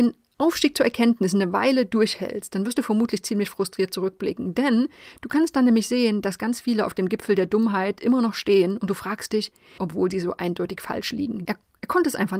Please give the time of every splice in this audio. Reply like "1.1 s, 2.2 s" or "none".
9.8 s, 11.4 s